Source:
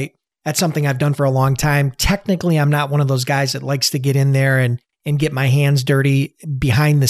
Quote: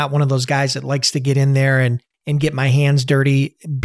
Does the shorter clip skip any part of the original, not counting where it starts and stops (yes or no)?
no